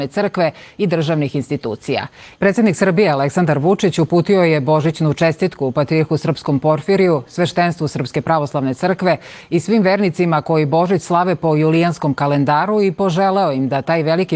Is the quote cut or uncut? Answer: cut